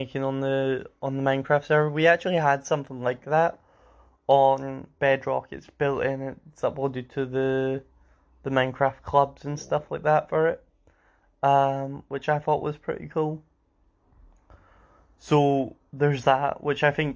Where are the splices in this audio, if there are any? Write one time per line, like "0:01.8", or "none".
none